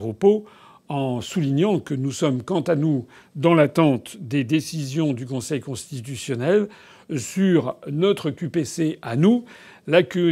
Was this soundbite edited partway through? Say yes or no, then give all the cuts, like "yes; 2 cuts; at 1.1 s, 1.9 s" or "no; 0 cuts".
no; 0 cuts